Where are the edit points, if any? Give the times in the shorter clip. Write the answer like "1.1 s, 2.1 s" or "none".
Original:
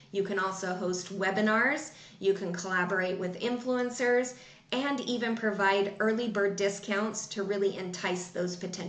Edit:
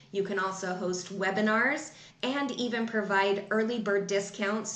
2.1 s